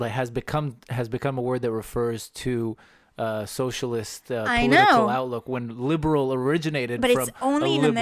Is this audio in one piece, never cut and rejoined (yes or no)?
yes